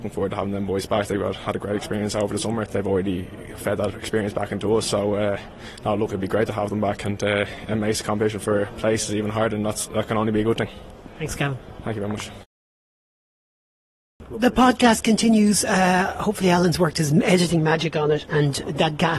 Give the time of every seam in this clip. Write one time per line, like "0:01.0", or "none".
0:02.7